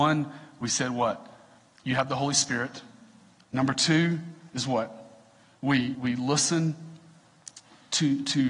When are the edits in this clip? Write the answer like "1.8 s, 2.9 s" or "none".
5.9 s